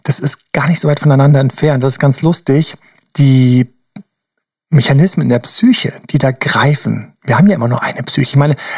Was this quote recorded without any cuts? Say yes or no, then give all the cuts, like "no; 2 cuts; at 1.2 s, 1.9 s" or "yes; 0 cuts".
yes; 0 cuts